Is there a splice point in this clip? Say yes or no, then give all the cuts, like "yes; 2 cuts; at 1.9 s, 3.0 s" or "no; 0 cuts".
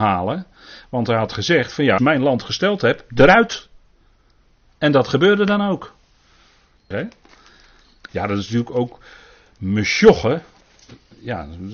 yes; 3 cuts; at 2.0 s, 6.9 s, 8.1 s